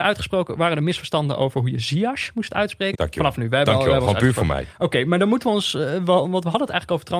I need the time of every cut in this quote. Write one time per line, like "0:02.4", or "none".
0:02.9